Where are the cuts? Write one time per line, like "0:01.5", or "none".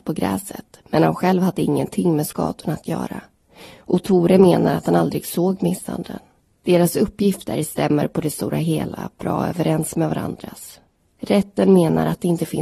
0:06.6